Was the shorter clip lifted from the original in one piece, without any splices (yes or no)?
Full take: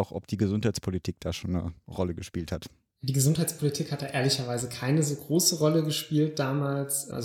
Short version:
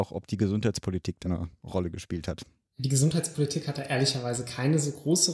no